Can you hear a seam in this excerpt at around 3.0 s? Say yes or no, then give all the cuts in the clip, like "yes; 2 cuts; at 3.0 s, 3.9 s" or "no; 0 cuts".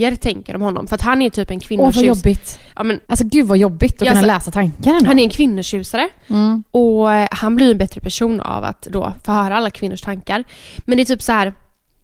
yes; 1 cut; at 3.0 s